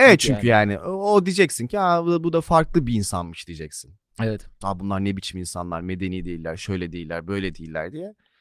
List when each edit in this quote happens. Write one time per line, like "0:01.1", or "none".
0:04.6